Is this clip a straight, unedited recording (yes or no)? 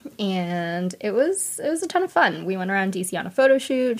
yes